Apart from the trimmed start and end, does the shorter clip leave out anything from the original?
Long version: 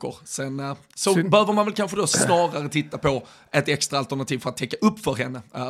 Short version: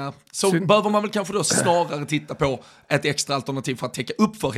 no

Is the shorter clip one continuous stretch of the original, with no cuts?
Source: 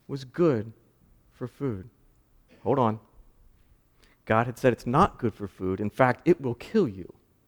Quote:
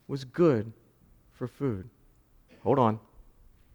yes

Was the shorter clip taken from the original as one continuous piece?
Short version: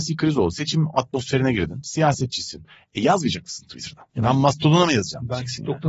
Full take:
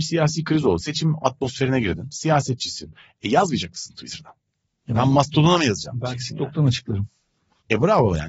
no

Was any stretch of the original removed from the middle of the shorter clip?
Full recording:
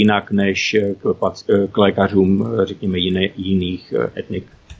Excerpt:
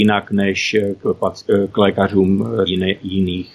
yes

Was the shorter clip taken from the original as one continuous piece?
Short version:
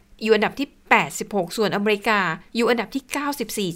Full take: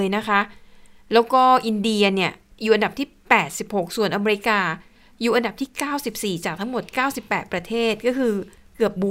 no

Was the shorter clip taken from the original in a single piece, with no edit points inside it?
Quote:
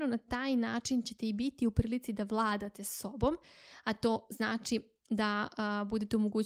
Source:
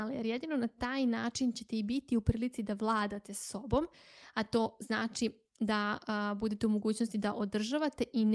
yes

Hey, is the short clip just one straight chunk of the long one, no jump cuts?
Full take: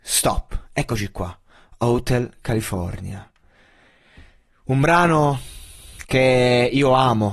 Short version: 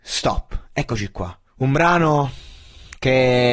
no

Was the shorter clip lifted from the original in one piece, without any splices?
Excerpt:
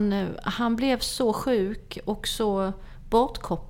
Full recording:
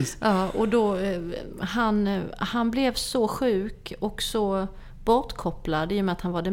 yes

